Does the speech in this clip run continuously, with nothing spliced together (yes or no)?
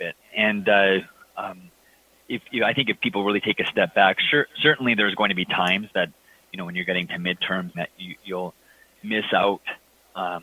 no